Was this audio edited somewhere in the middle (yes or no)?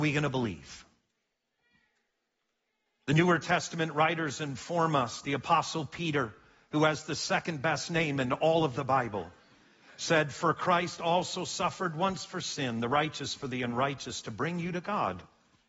no